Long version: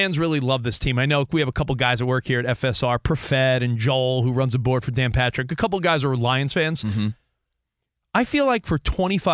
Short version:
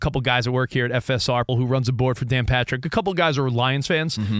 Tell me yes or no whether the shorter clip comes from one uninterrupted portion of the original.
no